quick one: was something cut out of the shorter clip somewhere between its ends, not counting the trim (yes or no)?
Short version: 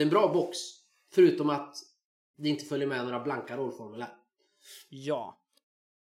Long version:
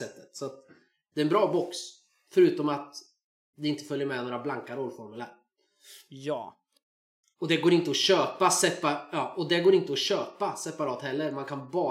no